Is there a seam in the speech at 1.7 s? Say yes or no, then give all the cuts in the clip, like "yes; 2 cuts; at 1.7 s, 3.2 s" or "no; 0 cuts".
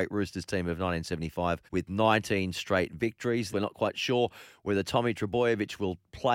yes; 2 cuts; at 1.7 s, 3.5 s